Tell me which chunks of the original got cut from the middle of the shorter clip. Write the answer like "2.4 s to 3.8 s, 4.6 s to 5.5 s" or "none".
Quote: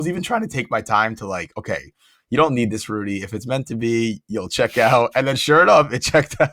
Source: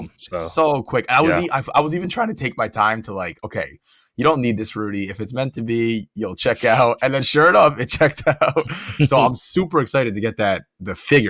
none